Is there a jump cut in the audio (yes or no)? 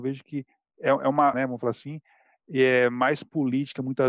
yes